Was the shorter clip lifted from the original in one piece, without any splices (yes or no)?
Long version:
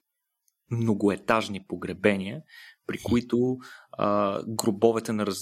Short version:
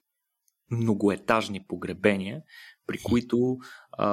yes